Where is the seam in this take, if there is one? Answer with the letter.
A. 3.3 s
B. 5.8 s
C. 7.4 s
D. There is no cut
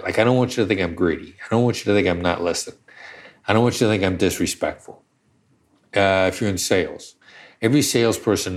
D